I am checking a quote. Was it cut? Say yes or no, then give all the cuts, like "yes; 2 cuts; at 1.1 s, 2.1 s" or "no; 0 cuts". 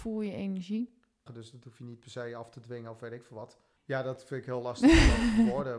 yes; 2 cuts; at 1.3 s, 3.8 s